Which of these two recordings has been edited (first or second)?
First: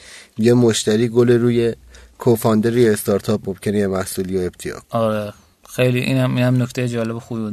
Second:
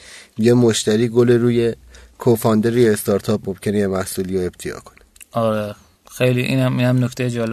first